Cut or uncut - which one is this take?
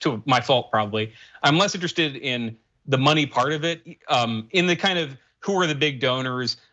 uncut